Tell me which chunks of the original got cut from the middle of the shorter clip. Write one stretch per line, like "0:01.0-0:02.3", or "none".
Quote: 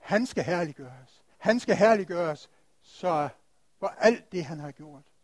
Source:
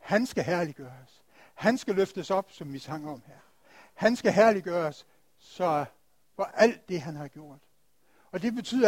0:01.3-0:03.9